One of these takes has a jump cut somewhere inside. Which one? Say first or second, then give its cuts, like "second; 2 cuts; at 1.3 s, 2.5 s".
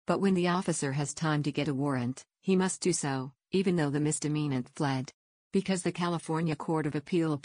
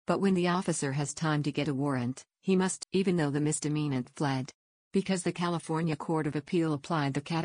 second; 1 cut; at 2.8 s